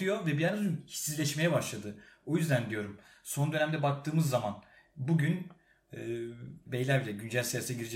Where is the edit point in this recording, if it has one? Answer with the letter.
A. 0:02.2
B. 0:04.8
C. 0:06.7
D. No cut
C